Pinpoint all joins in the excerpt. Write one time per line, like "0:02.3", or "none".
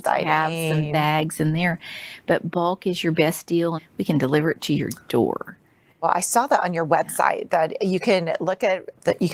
0:03.8